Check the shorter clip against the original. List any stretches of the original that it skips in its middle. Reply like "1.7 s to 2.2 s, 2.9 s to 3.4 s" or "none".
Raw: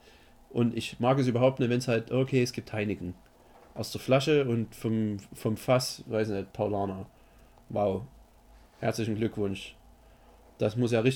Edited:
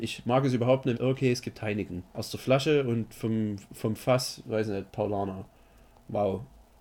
1.7 s to 2.0 s, 3.2 s to 3.7 s